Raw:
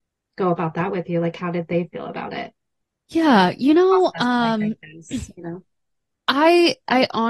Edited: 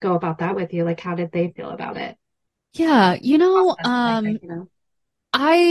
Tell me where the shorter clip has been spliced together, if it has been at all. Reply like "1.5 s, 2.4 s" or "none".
4.4 s

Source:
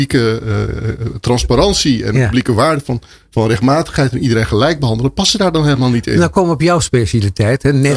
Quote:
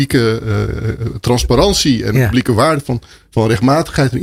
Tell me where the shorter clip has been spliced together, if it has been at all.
none

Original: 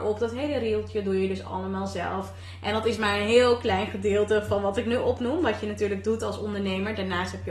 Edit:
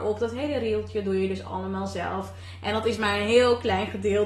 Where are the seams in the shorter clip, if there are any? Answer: none

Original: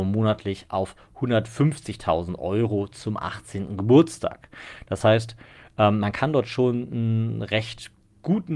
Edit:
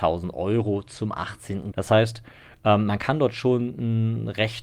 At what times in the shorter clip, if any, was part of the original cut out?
1.7 s

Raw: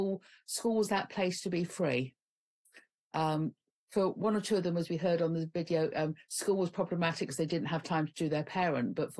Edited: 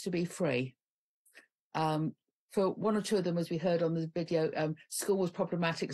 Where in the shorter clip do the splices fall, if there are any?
none

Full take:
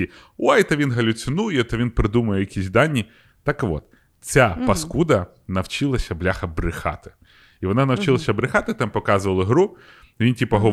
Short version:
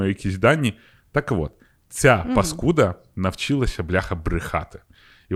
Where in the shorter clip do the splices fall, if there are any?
none

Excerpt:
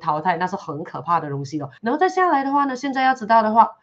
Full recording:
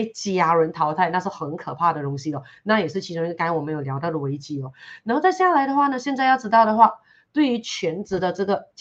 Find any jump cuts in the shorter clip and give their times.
1.8 s

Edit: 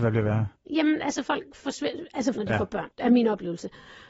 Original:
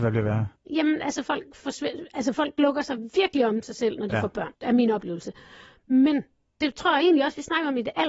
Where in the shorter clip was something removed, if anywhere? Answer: 2.3 s

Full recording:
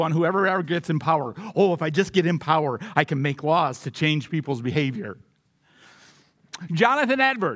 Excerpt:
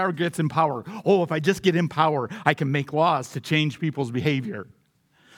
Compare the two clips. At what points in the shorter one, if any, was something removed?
none

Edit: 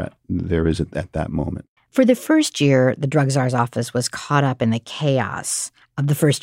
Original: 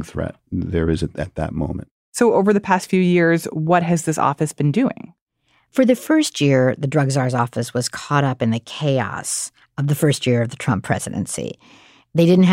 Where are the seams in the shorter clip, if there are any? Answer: 1.8 s

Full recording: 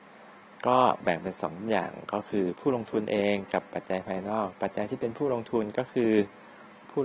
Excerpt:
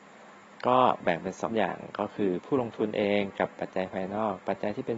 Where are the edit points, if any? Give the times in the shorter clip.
1.5 s

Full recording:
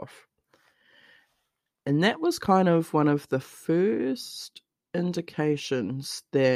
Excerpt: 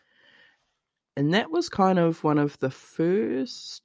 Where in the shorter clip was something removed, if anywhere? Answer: none

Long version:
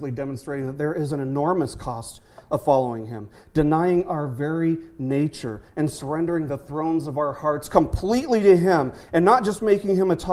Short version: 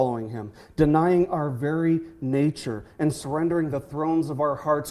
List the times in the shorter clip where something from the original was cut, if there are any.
none

